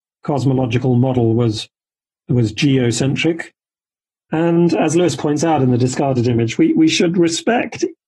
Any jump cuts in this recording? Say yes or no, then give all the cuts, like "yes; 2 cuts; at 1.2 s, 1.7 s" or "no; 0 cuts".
yes; 1 cut; at 4.2 s